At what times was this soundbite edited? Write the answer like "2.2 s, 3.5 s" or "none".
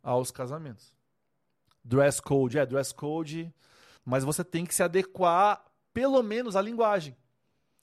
4.0 s